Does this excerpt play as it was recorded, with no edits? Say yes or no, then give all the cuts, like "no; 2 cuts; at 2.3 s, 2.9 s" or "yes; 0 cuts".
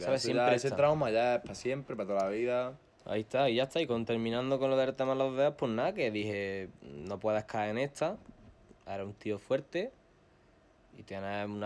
yes; 0 cuts